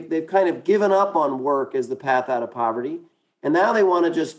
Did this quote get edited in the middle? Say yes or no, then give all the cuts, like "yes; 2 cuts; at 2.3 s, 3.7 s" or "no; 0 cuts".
no; 0 cuts